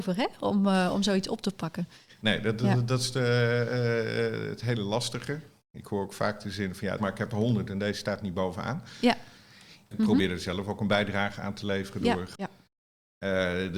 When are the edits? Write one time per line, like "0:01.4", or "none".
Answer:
0:07.0
0:09.9
0:12.3